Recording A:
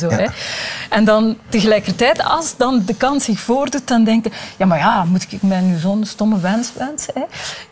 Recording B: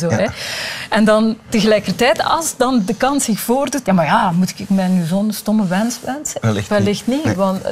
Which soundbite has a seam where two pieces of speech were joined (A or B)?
B